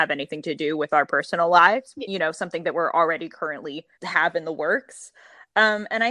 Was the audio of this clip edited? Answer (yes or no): yes